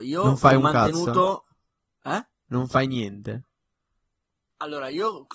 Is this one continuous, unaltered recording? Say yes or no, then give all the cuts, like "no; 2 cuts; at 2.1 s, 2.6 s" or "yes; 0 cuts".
yes; 0 cuts